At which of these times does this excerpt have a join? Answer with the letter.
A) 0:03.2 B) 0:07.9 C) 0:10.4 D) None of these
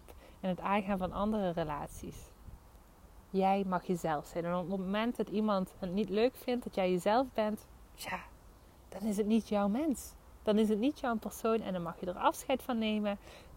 A